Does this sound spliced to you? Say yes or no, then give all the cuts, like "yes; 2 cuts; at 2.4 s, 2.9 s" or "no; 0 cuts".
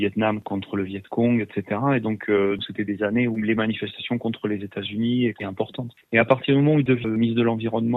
yes; 1 cut; at 7.0 s